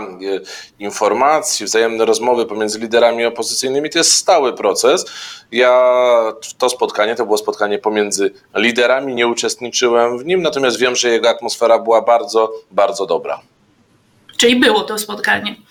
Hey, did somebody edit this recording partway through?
no; 0 cuts

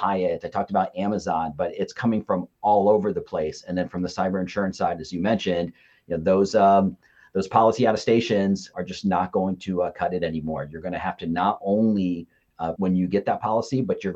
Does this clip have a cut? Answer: yes; 2 cuts; at 8.7 s, 12.8 s

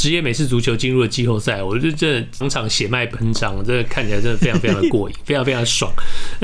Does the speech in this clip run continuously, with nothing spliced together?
no; 1 cut; at 2.4 s

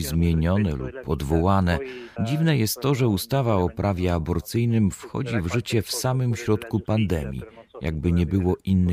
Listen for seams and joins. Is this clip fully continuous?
no; 1 cut; at 2.2 s

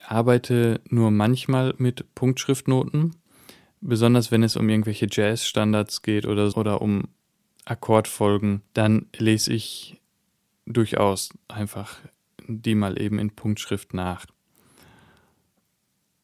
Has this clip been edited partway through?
yes; 2 cuts; at 6.5 s, 8.7 s

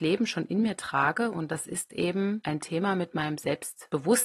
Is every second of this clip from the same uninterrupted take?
yes; 0 cuts

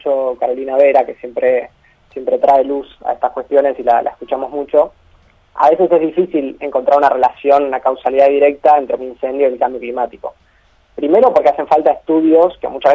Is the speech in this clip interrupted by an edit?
yes; 1 cut; at 9.0 s

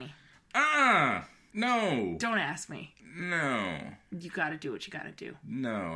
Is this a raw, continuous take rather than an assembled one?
no; 1 cut; at 1.5 s

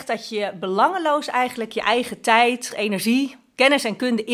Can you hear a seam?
yes; 1 cut; at 2.7 s

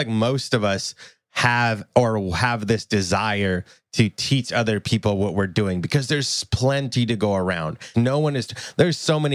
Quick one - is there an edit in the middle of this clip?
yes; 1 cut; at 7.9 s

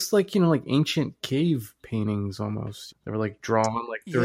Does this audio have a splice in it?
yes; 1 cut; at 2.9 s

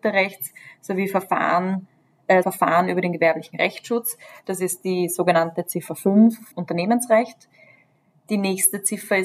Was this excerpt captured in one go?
no; 2 cuts; at 2.4 s, 6.5 s

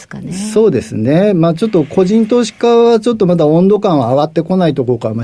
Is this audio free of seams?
yes; 0 cuts

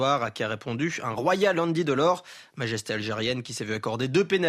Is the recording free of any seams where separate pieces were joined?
yes; 0 cuts

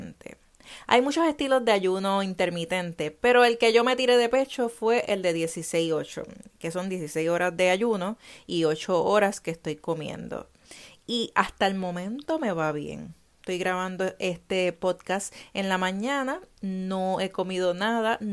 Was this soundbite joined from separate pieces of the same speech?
no; 0 cuts

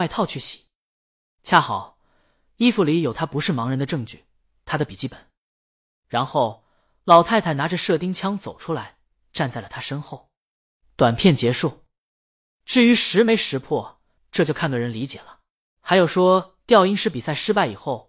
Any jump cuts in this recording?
yes; 2 cuts; at 14.2 s, 15.8 s

